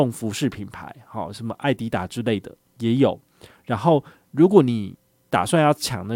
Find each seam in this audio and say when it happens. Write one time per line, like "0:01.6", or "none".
none